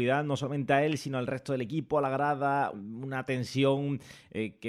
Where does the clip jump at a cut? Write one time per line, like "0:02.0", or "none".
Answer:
0:02.7